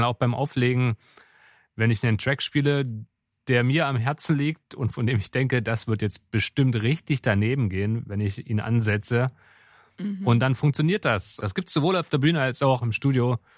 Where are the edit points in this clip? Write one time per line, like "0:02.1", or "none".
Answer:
0:11.4